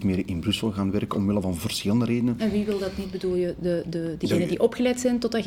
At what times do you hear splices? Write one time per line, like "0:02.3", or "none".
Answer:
none